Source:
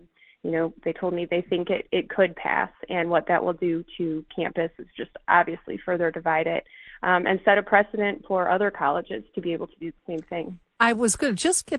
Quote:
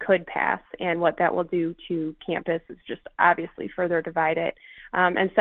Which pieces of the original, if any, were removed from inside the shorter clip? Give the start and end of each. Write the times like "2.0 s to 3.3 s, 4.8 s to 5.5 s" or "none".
none